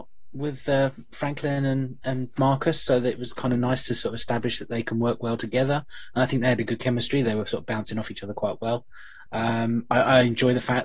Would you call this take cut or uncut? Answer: uncut